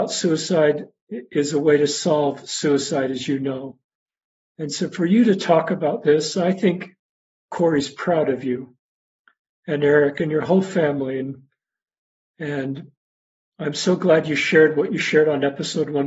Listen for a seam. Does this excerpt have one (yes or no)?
no